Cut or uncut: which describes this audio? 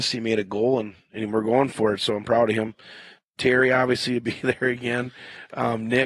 uncut